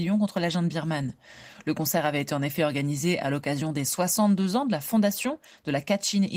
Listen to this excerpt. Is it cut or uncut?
uncut